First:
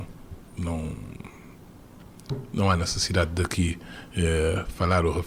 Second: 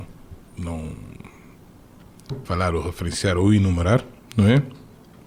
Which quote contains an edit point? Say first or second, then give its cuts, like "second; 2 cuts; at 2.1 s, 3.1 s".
second; 1 cut; at 2.5 s